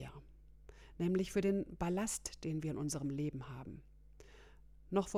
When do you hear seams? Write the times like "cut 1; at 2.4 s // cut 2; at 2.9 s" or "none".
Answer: none